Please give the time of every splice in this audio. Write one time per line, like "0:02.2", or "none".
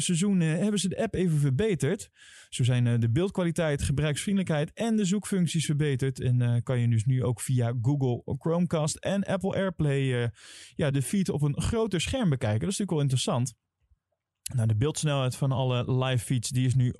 0:10.9